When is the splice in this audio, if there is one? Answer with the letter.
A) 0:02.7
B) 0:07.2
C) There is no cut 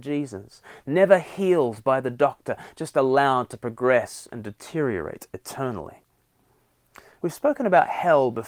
B